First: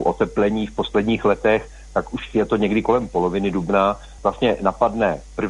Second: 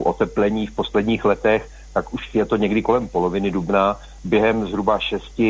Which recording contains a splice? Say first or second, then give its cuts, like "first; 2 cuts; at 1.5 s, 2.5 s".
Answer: second; 1 cut; at 4.2 s